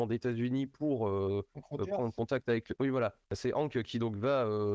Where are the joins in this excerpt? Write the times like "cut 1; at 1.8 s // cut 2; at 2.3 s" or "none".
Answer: cut 1; at 2.8 s